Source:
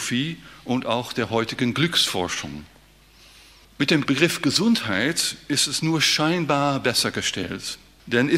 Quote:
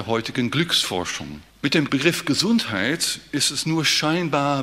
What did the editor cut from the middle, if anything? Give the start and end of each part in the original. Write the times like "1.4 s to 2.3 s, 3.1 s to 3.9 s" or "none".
2.7 s to 3.7 s